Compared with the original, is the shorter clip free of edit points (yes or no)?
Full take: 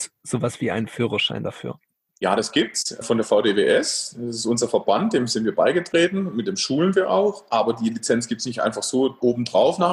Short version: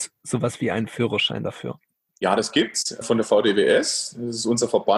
yes